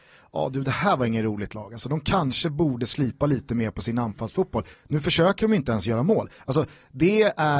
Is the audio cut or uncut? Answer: cut